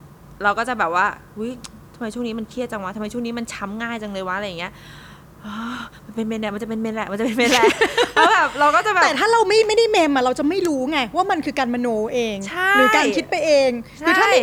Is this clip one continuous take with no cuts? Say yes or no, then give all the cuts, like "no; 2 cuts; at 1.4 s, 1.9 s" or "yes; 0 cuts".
yes; 0 cuts